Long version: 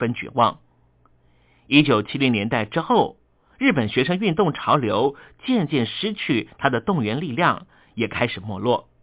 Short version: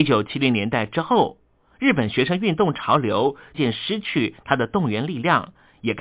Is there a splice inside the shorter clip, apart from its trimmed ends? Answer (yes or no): yes